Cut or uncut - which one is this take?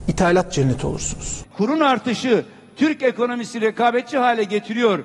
cut